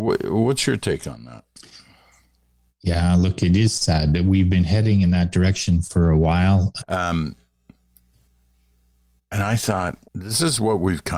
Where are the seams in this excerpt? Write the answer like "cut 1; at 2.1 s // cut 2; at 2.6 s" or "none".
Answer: cut 1; at 6.8 s // cut 2; at 10.0 s